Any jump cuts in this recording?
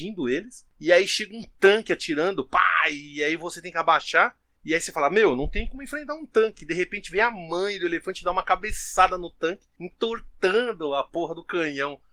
no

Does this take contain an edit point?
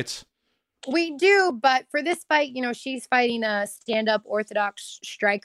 no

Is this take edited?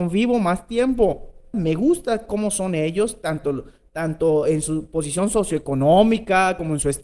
yes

